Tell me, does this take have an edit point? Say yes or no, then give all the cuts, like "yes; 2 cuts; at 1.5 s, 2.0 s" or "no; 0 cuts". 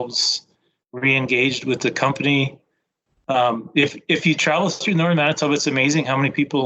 no; 0 cuts